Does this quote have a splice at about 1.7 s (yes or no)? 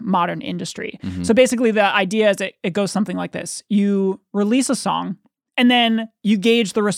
no